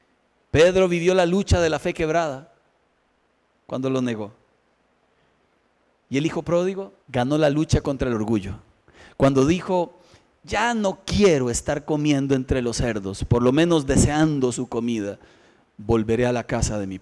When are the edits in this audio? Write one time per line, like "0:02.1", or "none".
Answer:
0:07.0